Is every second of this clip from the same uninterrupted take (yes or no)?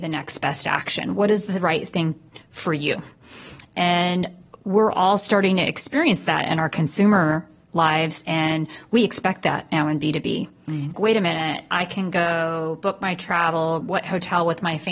no